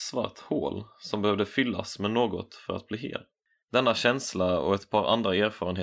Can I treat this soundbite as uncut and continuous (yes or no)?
no